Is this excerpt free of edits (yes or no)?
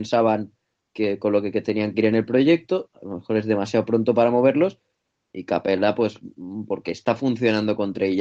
yes